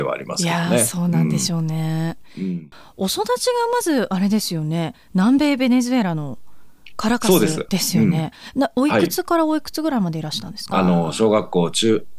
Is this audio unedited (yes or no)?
no